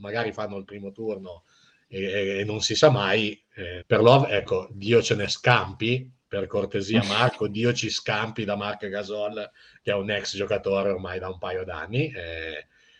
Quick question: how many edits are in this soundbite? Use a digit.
1